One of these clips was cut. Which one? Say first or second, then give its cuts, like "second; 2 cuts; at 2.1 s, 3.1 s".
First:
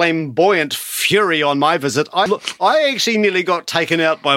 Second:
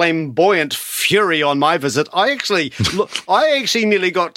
first; 1 cut; at 2.3 s